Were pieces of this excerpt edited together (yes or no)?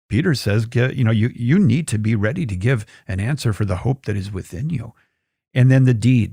no